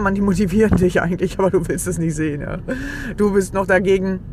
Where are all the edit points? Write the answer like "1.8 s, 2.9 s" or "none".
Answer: none